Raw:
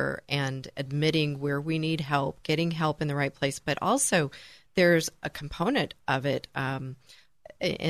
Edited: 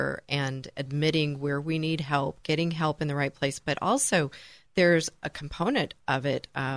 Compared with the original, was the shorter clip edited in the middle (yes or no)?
no